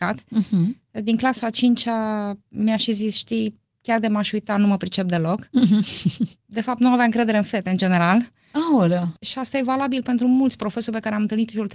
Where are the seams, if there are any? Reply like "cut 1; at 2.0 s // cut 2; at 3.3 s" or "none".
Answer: cut 1; at 6.4 s // cut 2; at 9.2 s